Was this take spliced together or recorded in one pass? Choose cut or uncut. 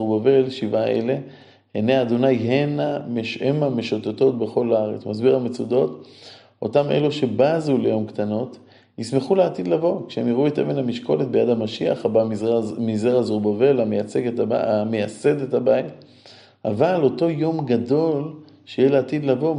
uncut